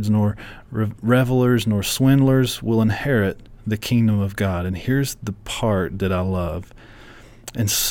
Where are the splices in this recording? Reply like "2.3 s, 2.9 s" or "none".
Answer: none